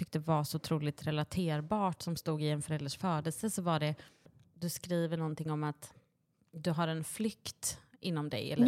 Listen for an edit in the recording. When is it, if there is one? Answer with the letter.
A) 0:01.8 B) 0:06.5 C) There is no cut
C